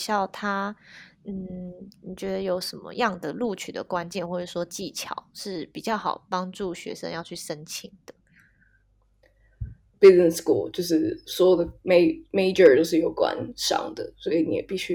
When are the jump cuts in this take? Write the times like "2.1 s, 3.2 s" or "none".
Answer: 9.9 s